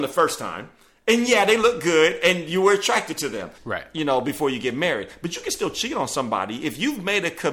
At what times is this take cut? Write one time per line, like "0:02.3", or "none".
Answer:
0:03.6